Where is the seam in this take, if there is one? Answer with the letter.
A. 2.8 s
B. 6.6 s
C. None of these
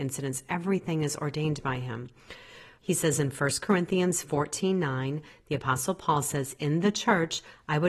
A